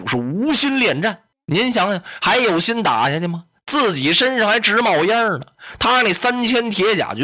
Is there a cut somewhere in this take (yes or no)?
no